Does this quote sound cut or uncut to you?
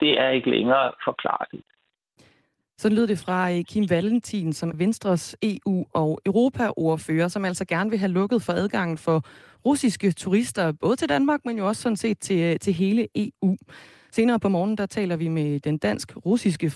cut